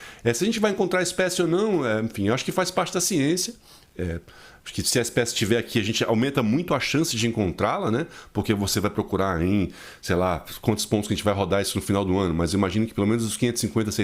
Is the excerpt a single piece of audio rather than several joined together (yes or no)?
yes